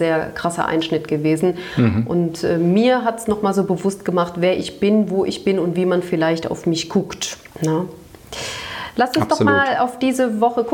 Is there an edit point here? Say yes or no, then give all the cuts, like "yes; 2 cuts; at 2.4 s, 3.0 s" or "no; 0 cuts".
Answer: yes; 1 cut; at 7.5 s